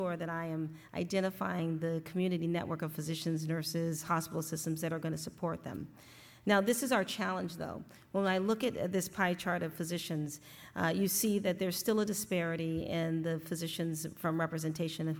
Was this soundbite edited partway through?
no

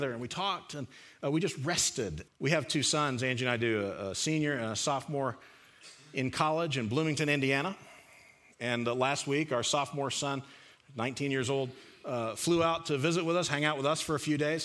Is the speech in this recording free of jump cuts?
no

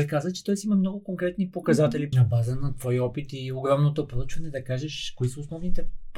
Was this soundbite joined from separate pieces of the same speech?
yes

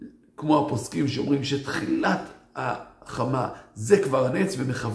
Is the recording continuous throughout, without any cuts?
yes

